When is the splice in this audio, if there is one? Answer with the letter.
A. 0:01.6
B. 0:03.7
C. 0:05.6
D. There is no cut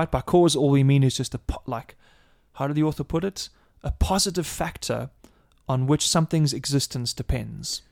D